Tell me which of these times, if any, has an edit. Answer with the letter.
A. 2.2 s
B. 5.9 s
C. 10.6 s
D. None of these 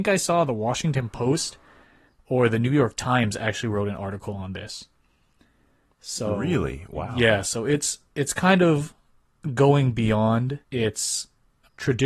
C